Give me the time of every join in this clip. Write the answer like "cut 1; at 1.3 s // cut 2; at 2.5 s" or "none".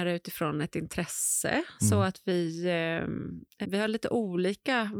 cut 1; at 3.6 s